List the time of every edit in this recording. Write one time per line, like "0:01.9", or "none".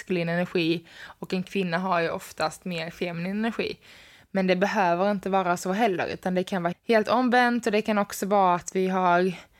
0:06.7

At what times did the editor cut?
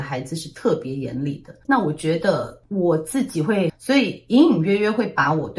0:01.6
0:03.7

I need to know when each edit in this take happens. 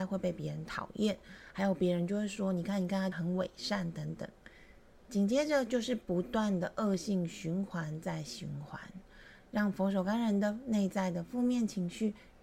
0:03.1
0:04.4

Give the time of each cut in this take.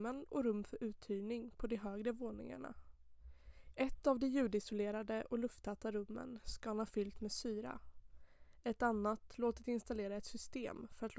0:03.7

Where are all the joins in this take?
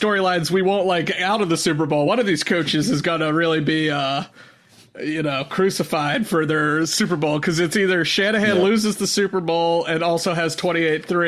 none

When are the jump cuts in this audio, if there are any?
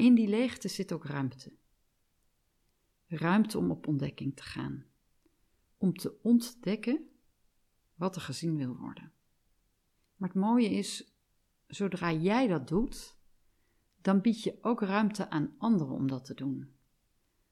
0:05.6
0:10.0

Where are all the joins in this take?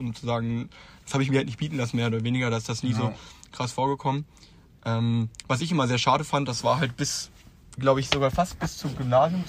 none

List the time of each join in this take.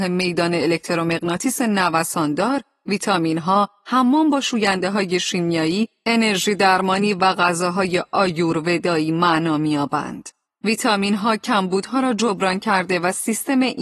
0:10.4

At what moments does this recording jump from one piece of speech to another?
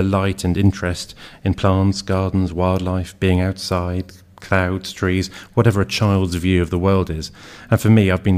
none

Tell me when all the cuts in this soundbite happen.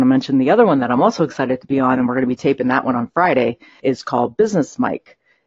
0:03.8

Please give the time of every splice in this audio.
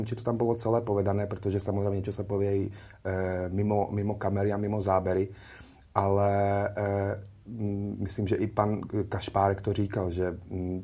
none

